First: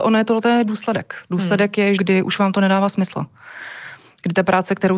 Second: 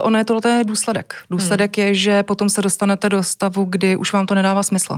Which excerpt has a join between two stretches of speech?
first; 1 cut; at 2.0 s

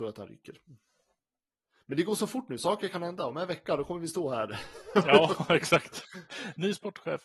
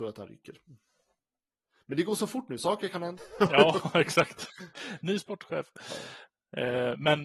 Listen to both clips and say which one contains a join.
second; 1 cut; at 3.2 s

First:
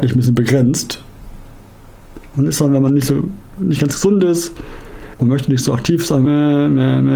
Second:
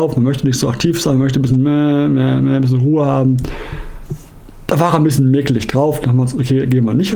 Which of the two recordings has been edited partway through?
first; 3 cuts; at 2.3 s, 5.2 s, 6.3 s

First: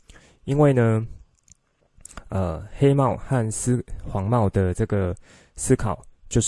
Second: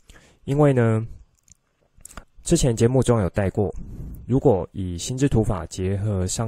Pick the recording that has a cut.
second; 1 cut; at 2.2 s

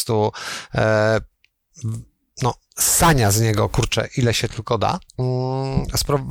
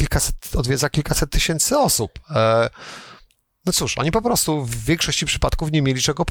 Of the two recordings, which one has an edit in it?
first; 1 cut; at 5.1 s

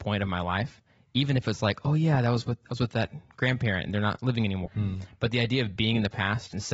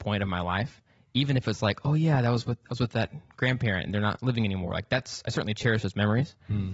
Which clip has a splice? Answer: first; 1 cut; at 4.7 s

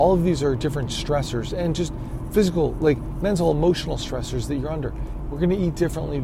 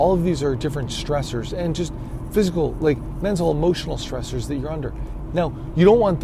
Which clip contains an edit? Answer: second; 1 cut; at 5.3 s

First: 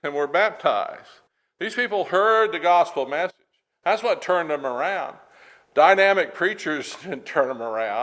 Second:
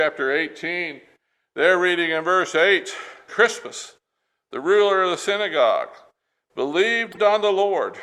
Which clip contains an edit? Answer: second; 1 cut; at 3.3 s

